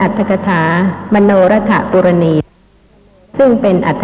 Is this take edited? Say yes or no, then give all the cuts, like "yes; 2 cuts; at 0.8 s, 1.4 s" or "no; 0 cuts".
no; 0 cuts